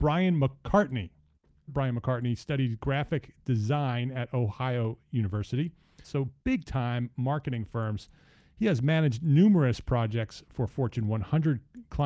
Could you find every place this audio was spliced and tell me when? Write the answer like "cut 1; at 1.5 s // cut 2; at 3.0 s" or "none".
cut 1; at 1.7 s // cut 2; at 6.0 s